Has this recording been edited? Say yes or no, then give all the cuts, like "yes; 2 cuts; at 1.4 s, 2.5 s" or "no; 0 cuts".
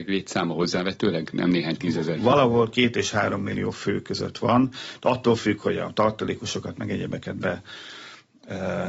no; 0 cuts